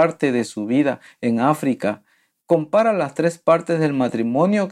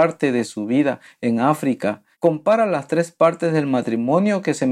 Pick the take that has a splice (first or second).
second